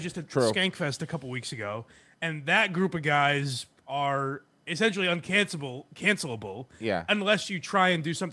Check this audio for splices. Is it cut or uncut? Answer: uncut